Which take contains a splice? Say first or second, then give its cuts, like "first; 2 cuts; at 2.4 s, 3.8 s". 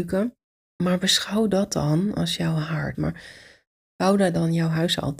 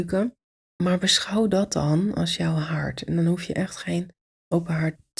first; 1 cut; at 2.9 s